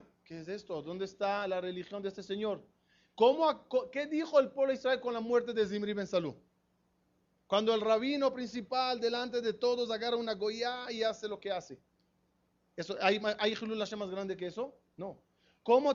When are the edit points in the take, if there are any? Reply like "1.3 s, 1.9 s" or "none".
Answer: none